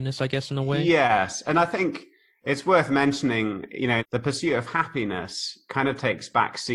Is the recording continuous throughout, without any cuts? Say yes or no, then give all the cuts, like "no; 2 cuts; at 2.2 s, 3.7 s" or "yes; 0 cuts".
no; 1 cut; at 4.0 s